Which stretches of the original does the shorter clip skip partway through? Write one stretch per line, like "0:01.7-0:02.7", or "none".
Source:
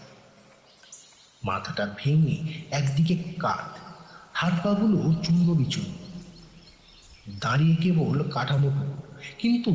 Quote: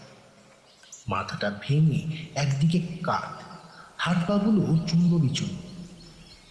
0:01.0-0:01.4